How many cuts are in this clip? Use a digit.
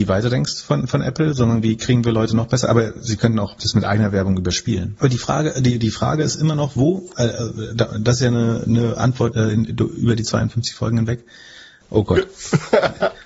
3